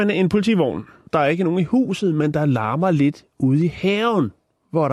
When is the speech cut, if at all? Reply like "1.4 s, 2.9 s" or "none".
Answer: 1.1 s